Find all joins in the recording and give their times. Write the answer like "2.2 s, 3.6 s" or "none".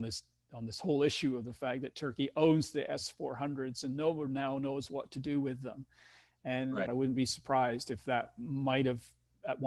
6.9 s